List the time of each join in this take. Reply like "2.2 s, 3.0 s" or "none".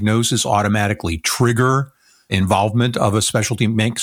none